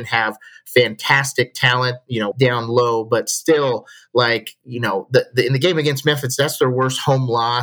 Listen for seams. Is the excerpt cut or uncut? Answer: cut